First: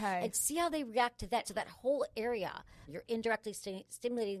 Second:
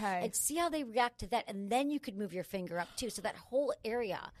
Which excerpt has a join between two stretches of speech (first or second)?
first